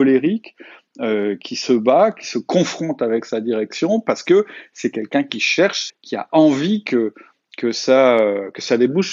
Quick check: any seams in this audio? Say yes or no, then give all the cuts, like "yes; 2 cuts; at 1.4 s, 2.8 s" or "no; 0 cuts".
yes; 1 cut; at 5.9 s